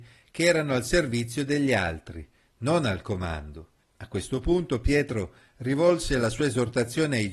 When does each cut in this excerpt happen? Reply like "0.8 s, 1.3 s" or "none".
3.8 s